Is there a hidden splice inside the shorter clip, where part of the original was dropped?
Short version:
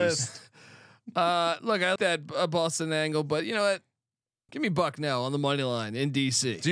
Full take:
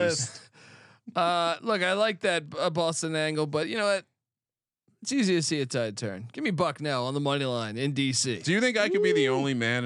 yes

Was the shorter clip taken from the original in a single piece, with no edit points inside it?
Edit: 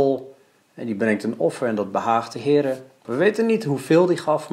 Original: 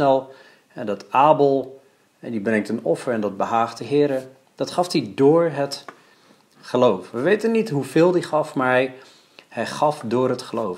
no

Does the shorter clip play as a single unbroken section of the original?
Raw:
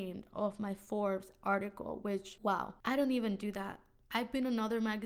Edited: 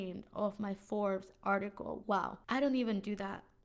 no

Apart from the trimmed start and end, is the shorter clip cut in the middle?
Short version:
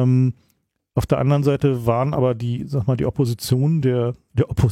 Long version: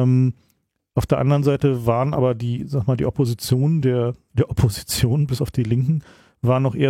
no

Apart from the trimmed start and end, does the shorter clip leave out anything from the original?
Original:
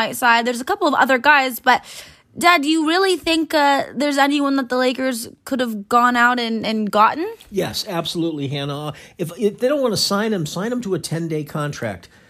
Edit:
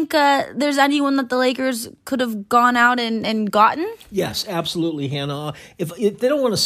no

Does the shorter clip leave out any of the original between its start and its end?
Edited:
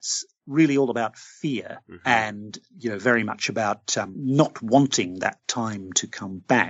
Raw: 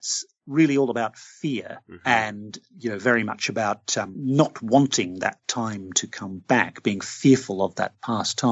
no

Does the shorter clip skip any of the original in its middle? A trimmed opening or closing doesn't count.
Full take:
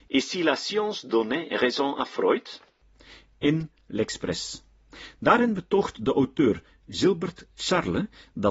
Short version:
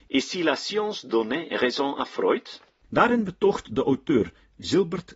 yes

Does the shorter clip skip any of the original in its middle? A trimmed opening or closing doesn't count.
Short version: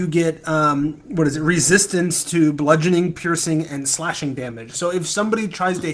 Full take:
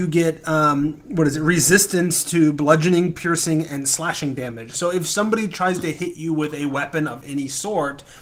no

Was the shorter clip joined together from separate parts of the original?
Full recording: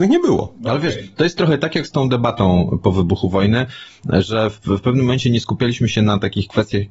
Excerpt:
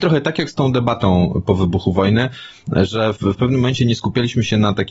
yes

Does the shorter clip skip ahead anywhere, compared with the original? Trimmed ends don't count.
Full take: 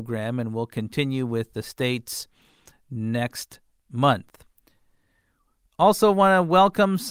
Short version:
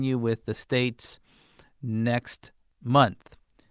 no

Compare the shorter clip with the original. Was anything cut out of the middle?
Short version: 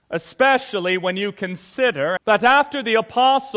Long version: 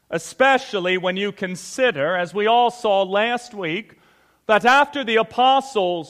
yes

